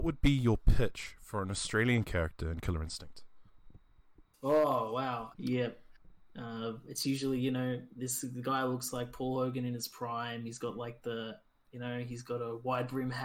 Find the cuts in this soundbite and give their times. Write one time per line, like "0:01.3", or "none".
0:05.3